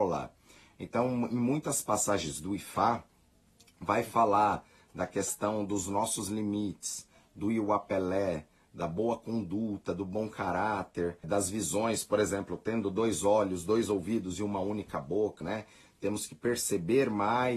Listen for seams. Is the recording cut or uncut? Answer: cut